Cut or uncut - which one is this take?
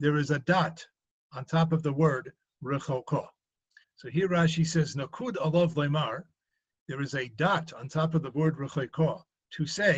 cut